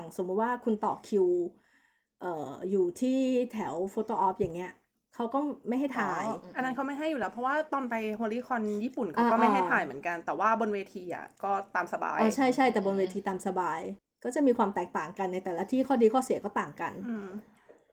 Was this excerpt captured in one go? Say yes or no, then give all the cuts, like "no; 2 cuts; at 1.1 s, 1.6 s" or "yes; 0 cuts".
yes; 0 cuts